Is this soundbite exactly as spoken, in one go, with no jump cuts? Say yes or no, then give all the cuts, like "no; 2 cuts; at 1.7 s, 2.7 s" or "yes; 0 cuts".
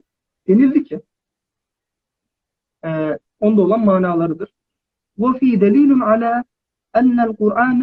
no; 1 cut; at 3.2 s